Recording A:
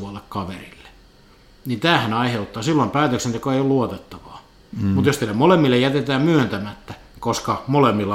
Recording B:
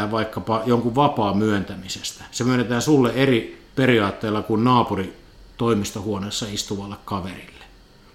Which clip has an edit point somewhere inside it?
B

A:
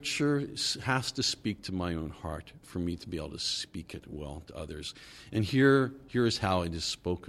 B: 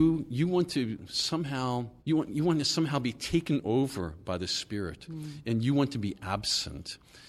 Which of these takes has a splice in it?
B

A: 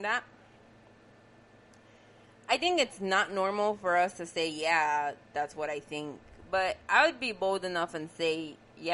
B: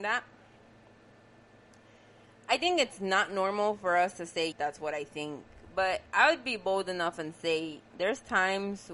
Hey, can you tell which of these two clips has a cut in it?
B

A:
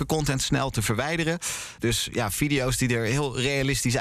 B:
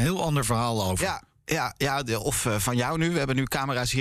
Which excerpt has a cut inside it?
A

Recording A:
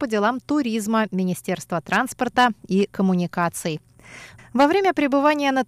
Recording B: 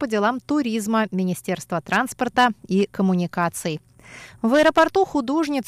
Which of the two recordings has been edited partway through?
A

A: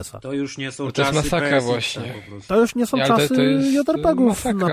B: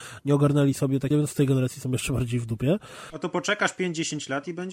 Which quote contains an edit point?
B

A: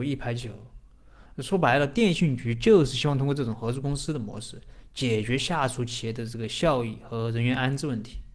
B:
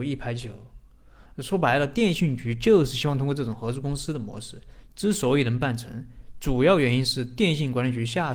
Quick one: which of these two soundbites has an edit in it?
B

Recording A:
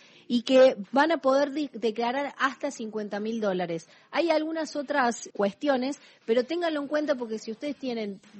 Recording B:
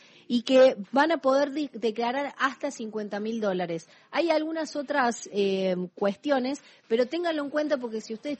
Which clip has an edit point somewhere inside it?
A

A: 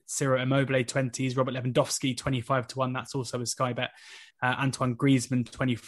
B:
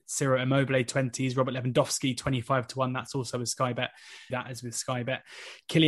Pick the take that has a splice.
B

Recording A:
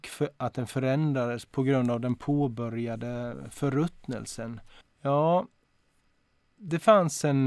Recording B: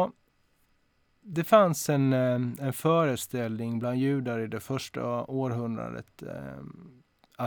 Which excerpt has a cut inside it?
A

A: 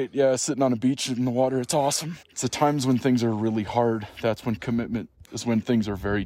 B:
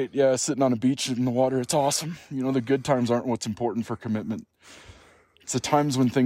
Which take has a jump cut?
A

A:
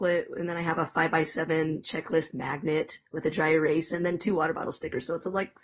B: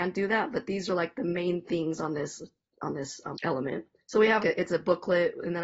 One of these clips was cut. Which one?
B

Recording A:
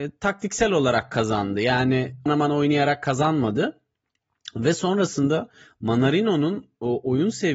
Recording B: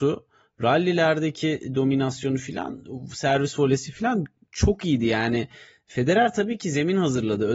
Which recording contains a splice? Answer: A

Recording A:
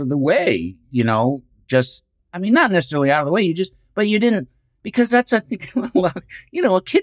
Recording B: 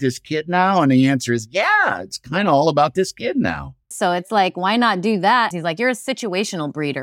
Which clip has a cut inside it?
B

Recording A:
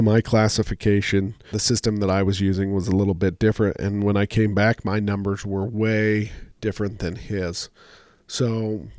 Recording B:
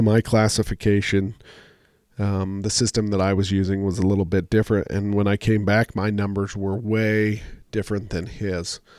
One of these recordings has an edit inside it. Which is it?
A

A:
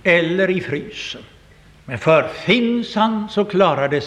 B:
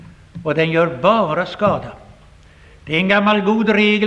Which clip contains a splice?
A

